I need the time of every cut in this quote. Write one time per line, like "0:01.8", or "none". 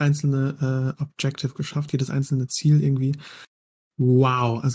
none